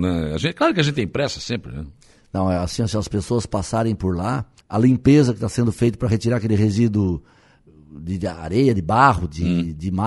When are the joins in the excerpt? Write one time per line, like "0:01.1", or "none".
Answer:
0:04.6